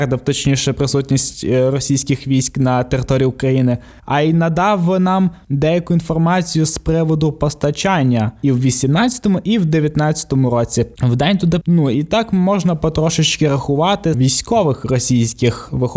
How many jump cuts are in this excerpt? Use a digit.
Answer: 2